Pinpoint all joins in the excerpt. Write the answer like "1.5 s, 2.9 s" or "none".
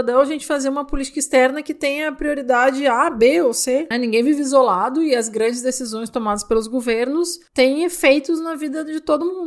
3.9 s

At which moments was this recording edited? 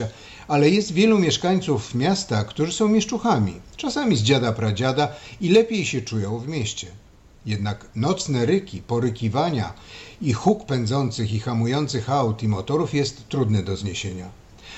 none

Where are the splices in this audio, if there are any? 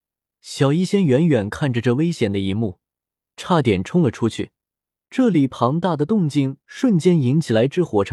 3.3 s, 5.0 s

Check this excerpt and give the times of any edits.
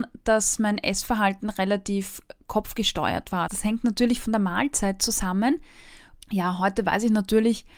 3.5 s, 6.2 s

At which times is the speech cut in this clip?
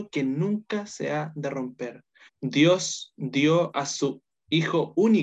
2.3 s

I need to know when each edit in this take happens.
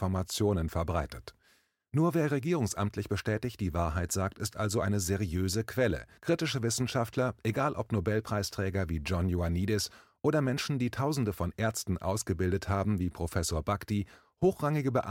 6.2 s

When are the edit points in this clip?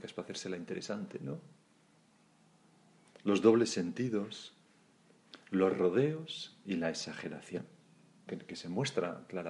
8.3 s

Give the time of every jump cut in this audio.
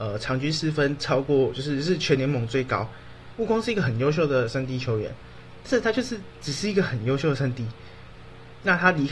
3.4 s

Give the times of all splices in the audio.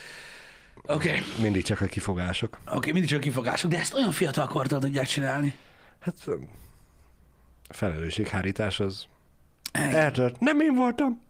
none

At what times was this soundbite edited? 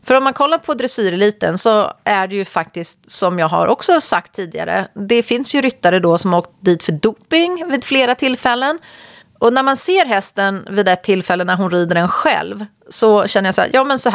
9.2 s

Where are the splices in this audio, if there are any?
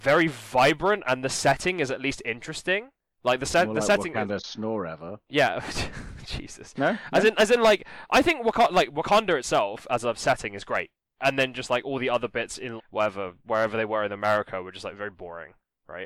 11.2 s, 12.8 s

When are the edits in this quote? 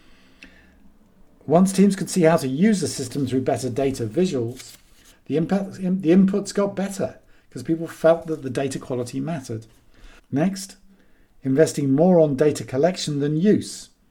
5.1 s, 10.2 s

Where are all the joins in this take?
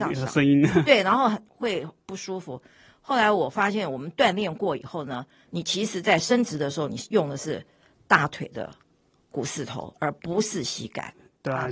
none

